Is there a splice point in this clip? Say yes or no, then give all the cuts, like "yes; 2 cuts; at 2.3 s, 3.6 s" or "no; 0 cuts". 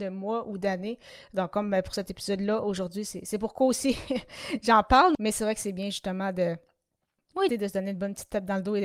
yes; 2 cuts; at 5.1 s, 7.5 s